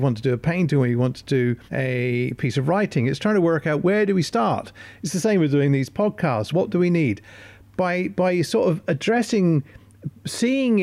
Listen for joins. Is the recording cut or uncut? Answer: cut